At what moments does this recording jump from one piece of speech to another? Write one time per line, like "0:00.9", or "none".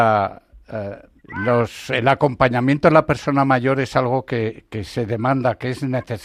0:01.2